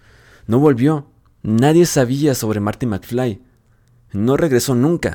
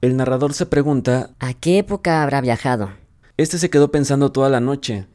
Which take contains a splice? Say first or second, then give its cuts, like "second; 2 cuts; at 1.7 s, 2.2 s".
second; 2 cuts; at 1.3 s, 3.2 s